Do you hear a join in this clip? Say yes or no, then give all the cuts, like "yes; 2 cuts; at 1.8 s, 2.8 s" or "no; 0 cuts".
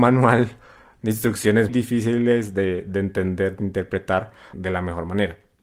yes; 2 cuts; at 1.7 s, 4.5 s